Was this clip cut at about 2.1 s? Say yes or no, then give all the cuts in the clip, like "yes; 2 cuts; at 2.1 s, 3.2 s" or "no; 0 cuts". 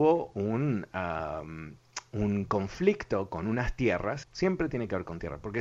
no; 1 cut; at 4.2 s